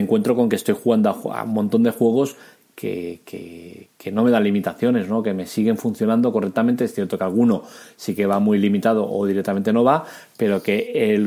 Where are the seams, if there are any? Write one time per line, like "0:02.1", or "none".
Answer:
none